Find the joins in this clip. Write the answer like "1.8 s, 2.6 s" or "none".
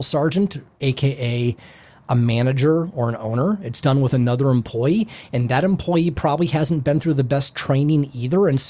none

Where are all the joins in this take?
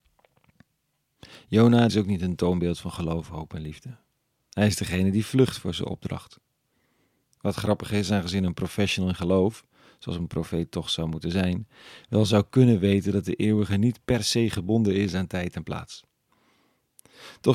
1.9 s

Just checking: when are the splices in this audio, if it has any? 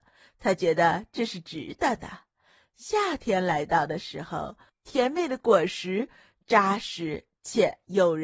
4.7 s

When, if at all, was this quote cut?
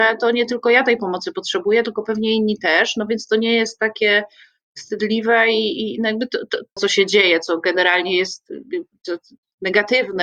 6.8 s

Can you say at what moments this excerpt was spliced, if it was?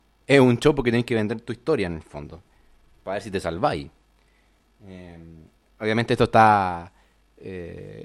none

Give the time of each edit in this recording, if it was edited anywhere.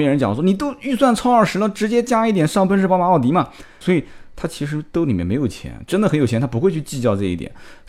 3.8 s

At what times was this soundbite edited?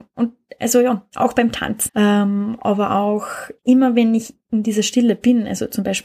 1.9 s, 3.6 s

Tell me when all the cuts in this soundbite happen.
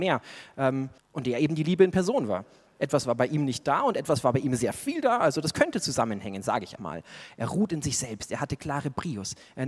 1.0 s, 6.8 s

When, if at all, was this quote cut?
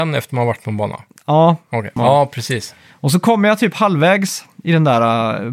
2.0 s

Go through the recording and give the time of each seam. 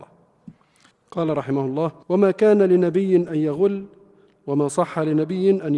0.9 s, 2.0 s

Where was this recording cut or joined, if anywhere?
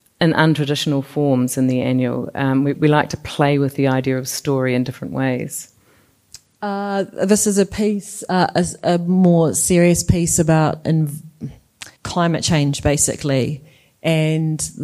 2.7 s, 10.8 s, 12.0 s

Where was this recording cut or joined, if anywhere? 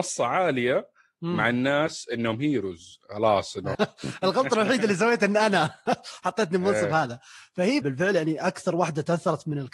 3.7 s, 7.8 s

